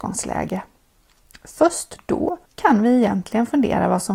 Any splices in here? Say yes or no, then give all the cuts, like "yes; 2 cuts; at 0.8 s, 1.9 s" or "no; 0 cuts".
yes; 1 cut; at 2.5 s